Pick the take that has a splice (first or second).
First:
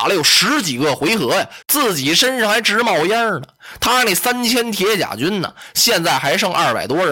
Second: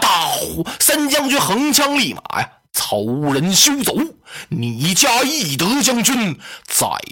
first